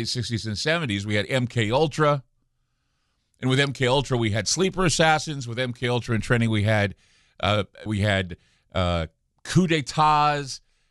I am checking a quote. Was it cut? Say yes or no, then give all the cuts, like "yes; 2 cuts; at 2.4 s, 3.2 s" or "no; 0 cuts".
yes; 1 cut; at 7.9 s